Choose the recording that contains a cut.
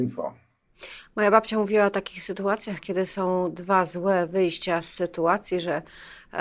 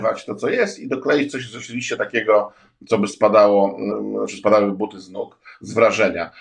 second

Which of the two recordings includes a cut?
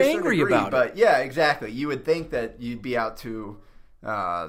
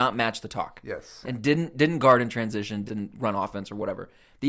second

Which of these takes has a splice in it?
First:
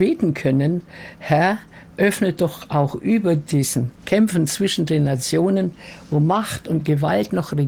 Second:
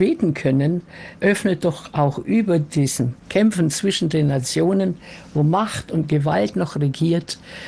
second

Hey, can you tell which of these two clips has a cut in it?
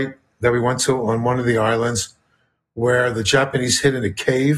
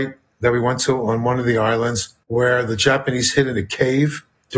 second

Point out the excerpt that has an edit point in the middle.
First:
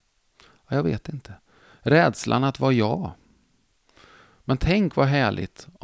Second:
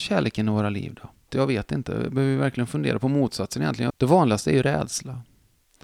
second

